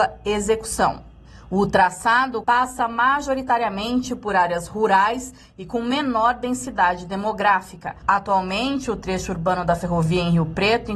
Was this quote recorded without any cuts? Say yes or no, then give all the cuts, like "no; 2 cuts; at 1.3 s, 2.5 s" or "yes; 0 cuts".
no; 2 cuts; at 2.4 s, 8.0 s